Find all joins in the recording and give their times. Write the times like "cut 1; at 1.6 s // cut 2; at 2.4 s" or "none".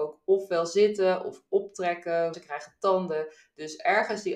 cut 1; at 2.3 s